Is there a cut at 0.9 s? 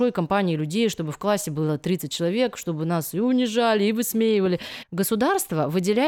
no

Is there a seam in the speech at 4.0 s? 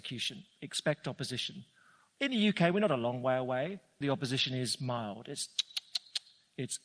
yes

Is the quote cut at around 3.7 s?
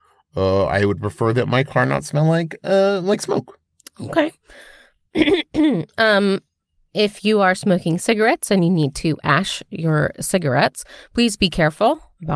no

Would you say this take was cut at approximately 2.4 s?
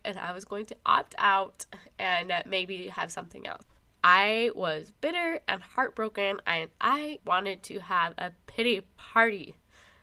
no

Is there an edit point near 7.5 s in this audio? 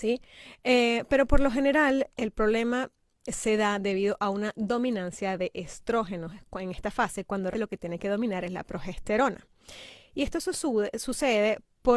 yes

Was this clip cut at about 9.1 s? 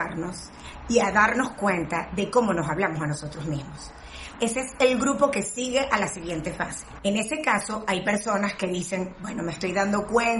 no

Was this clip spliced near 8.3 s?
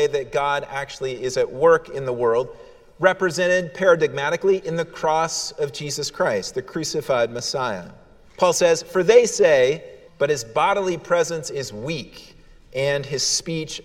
yes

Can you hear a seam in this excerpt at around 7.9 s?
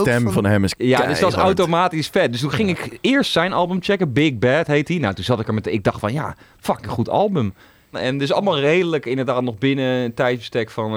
yes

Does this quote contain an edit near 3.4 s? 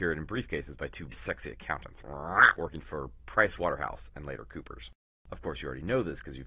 no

